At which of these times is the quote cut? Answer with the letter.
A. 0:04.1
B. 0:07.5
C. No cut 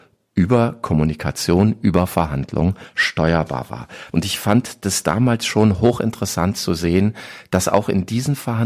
A